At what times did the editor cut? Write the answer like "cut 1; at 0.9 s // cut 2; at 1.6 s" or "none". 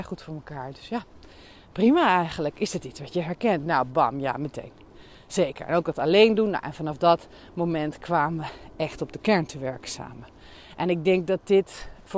none